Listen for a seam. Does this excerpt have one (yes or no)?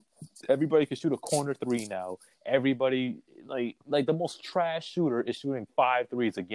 no